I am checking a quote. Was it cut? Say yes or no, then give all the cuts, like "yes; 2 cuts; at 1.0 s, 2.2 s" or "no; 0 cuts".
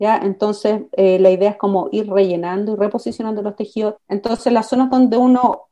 yes; 1 cut; at 4.0 s